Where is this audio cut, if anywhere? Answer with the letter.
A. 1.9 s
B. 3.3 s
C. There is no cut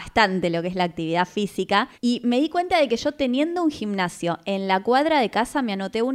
A